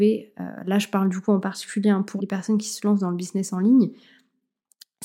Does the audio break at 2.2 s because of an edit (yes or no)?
yes